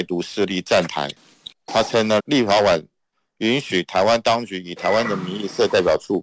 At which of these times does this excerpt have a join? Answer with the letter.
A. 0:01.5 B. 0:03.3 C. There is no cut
A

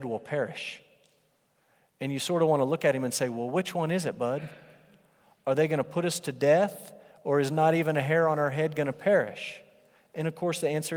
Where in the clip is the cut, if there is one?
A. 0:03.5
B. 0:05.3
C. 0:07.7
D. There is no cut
D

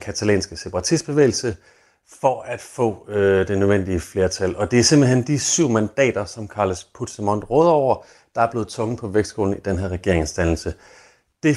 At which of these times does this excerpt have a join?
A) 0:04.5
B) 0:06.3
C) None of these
C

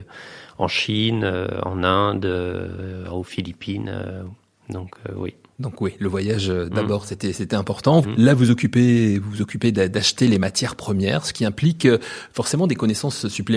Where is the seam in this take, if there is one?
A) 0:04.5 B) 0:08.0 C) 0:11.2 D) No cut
B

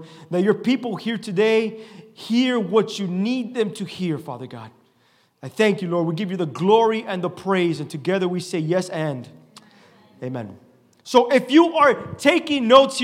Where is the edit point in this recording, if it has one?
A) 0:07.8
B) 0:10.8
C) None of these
C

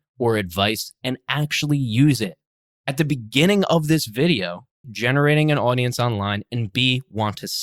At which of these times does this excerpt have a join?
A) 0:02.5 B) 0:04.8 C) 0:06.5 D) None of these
B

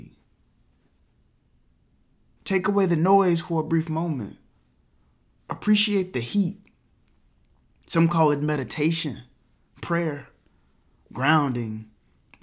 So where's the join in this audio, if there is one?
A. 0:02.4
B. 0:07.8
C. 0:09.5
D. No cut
A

